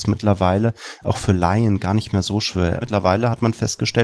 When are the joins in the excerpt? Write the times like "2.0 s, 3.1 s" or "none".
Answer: 2.8 s